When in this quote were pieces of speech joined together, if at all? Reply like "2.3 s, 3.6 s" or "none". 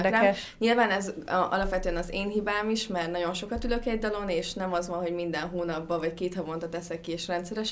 none

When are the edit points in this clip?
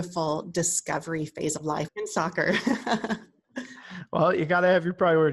1.9 s

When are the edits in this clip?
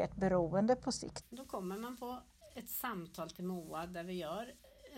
1.2 s

